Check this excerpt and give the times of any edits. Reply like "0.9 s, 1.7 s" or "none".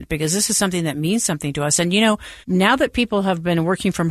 2.4 s